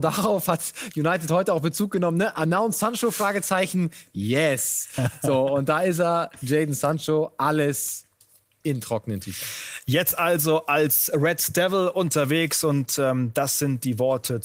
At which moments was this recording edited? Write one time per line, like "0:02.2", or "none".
none